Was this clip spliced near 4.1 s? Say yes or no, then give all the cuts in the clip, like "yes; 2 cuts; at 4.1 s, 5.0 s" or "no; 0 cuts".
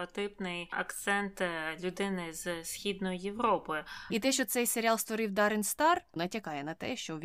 yes; 2 cuts; at 4.1 s, 6.2 s